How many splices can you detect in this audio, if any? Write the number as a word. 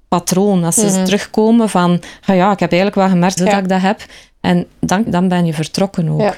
two